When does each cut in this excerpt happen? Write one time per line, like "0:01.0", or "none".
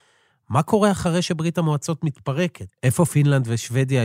0:02.7